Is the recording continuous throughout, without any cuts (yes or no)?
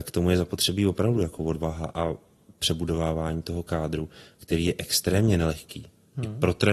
yes